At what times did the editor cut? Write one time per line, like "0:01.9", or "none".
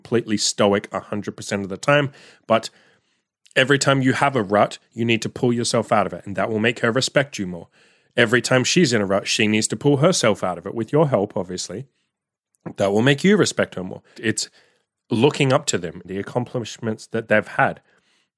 0:14.1
0:16.0